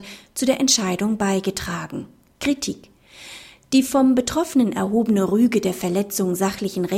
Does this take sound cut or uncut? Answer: cut